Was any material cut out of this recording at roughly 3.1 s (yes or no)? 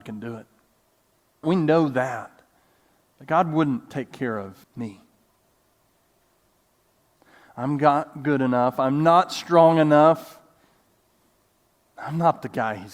no